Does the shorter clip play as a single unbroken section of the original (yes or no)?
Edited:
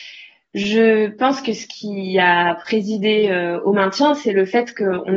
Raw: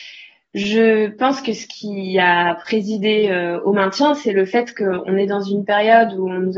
yes